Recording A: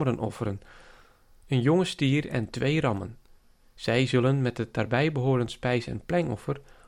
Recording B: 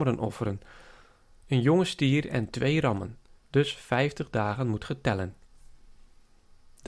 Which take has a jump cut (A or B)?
B